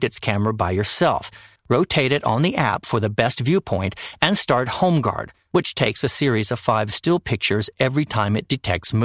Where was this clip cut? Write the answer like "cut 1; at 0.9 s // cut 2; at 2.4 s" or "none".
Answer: cut 1; at 1.6 s